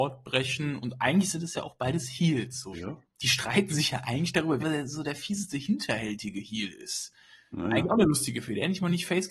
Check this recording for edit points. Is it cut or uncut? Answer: cut